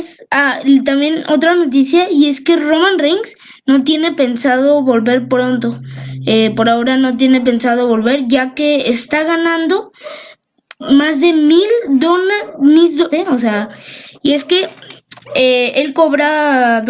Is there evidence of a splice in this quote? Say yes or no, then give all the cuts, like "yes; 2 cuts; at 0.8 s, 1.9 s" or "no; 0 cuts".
yes; 1 cut; at 13.1 s